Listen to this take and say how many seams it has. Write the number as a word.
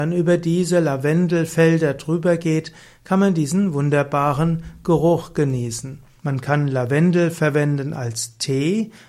one